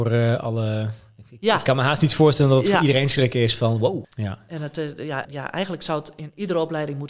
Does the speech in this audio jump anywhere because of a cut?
yes; 2 cuts; at 4.0 s, 5.2 s

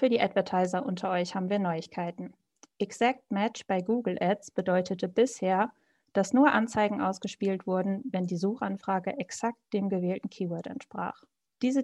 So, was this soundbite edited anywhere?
no; 0 cuts

